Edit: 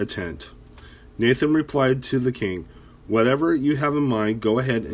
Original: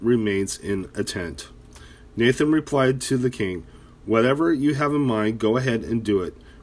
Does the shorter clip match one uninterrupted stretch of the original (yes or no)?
yes